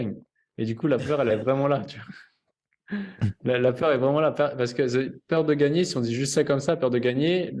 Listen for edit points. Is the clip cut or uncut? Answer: uncut